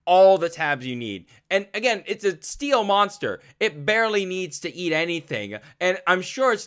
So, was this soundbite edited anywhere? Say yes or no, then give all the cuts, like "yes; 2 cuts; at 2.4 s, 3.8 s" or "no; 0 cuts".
no; 0 cuts